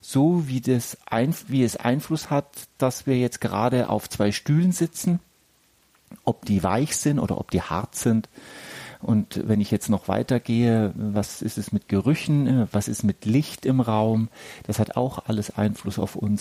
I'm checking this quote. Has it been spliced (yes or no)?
no